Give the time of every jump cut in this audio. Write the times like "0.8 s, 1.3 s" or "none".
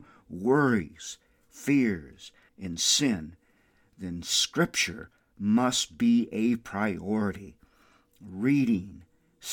2.5 s